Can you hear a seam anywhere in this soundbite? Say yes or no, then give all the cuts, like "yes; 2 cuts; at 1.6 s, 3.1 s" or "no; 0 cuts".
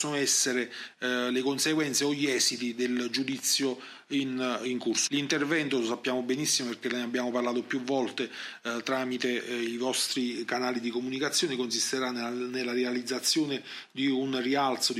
yes; 1 cut; at 5.1 s